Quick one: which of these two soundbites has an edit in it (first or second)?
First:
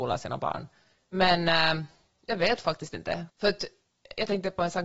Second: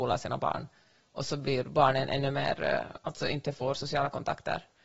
first